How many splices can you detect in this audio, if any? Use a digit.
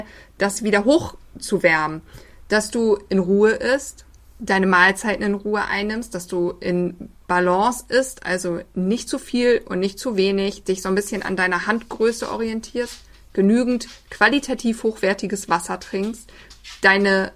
0